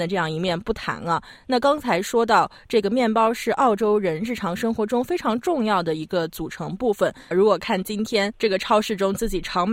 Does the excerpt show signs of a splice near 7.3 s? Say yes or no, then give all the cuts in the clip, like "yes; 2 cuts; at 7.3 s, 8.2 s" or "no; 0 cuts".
yes; 1 cut; at 7.3 s